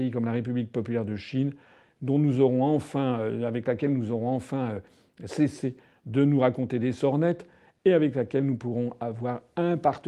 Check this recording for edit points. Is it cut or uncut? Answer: uncut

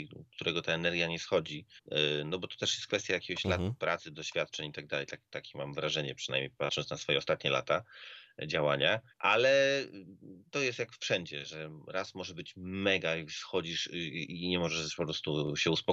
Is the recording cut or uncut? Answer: cut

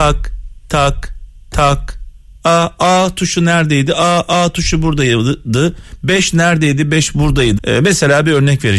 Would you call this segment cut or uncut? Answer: cut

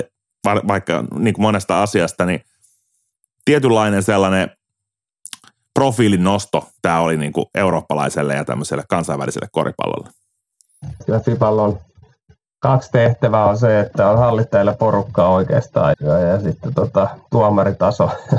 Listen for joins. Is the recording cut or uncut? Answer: cut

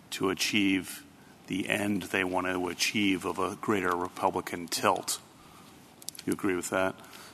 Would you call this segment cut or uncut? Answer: uncut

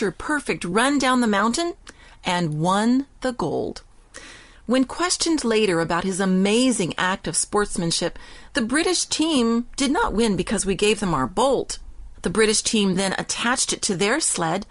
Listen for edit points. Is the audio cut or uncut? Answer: cut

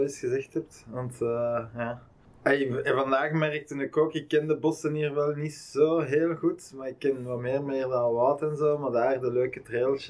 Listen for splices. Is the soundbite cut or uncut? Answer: uncut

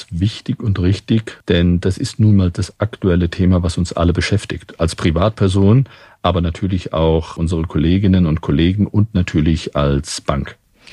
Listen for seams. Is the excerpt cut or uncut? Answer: uncut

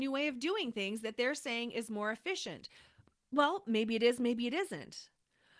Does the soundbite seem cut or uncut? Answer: uncut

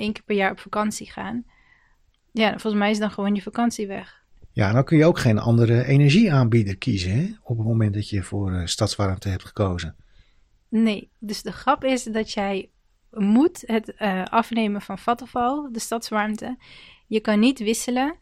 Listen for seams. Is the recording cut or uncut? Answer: uncut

